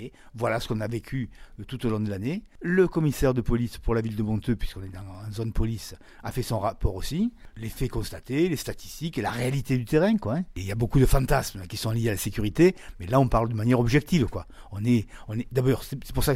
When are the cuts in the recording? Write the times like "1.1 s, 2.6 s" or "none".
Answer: none

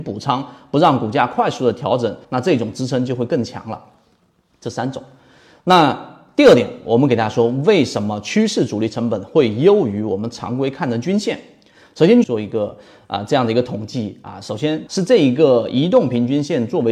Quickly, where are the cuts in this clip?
2.2 s, 12.2 s, 14.9 s

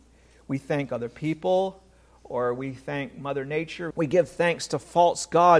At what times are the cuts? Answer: 3.9 s

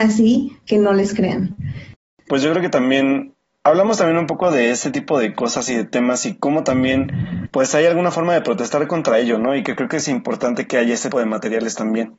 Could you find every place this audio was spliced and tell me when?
7.5 s, 11.1 s

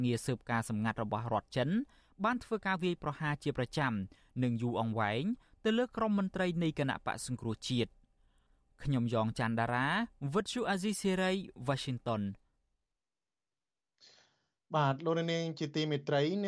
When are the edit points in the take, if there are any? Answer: none

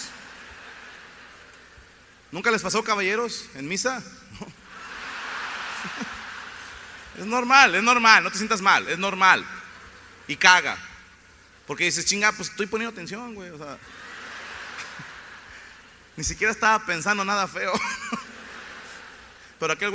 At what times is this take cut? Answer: none

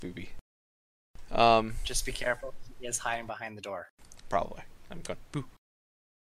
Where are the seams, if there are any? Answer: none

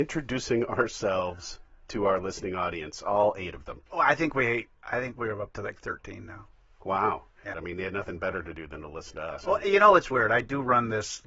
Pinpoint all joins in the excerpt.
3.9 s, 7.5 s, 10.1 s

